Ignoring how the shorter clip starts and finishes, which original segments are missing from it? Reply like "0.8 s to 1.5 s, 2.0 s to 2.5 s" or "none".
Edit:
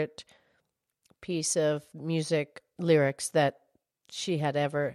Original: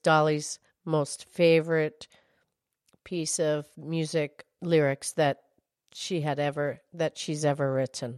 none